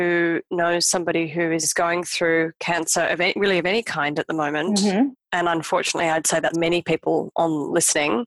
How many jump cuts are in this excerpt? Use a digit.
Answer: 1